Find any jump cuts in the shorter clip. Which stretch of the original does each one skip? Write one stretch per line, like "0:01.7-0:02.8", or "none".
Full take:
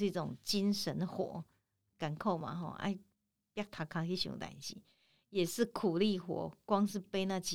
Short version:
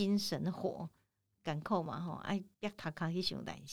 0:03.1-0:03.5